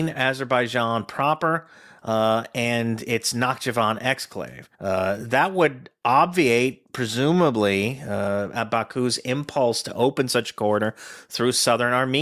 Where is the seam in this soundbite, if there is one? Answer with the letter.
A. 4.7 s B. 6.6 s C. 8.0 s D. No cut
A